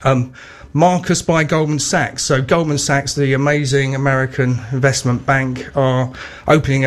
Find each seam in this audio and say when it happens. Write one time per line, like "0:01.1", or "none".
none